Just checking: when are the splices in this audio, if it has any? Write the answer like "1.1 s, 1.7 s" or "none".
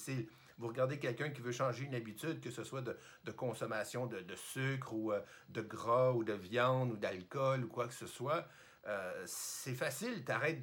none